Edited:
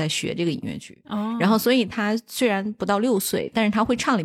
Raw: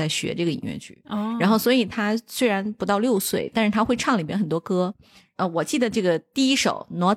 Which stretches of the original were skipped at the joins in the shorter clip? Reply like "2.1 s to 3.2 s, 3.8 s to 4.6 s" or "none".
none